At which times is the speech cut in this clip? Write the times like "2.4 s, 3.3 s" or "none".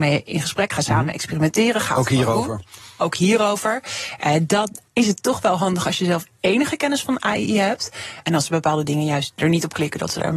4.9 s, 8.2 s